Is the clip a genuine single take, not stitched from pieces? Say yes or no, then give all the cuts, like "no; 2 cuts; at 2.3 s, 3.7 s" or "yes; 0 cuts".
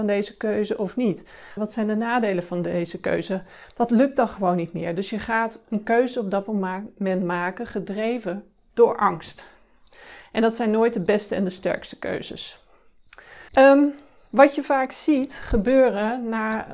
no; 2 cuts; at 1.6 s, 13.5 s